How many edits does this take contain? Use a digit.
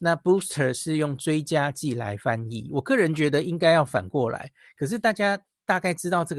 0